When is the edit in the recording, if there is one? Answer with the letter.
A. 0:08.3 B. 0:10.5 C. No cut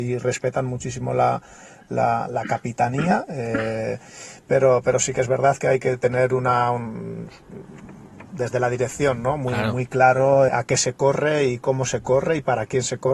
B